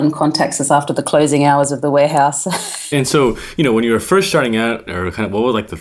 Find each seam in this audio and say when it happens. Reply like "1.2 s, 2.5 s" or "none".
2.9 s, 4.9 s